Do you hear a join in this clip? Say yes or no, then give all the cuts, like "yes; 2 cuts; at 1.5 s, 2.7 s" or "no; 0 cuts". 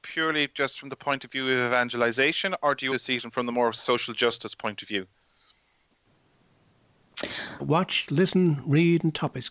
yes; 2 cuts; at 2.9 s, 7.6 s